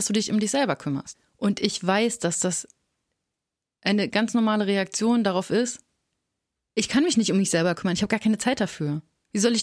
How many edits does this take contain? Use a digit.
1